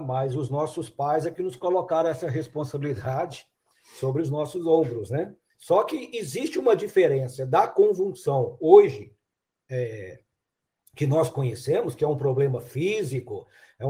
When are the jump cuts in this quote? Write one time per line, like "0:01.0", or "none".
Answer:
0:05.5